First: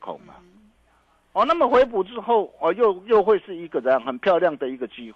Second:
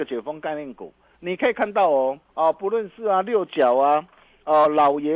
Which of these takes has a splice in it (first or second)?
second